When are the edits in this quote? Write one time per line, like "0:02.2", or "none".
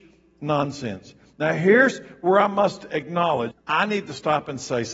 0:03.5